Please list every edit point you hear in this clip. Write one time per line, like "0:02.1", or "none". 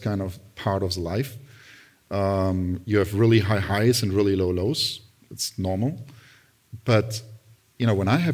none